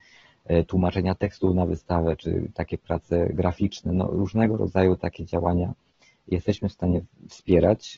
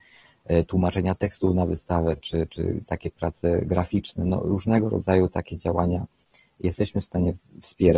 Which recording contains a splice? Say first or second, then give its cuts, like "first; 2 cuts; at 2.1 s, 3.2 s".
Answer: first; 1 cut; at 2.2 s